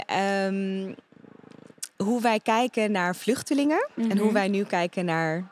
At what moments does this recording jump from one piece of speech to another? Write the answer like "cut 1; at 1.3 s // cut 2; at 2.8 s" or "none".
cut 1; at 2.0 s